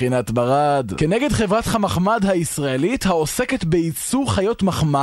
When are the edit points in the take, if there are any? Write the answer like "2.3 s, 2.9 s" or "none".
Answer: none